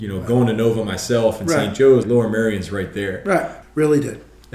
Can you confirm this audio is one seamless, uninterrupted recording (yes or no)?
no